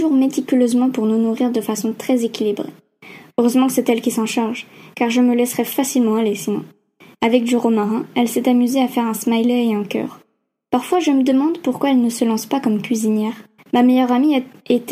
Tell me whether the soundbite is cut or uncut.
cut